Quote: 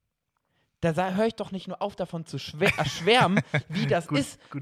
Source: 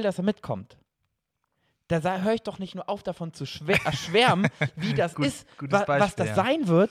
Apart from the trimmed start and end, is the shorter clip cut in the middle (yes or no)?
no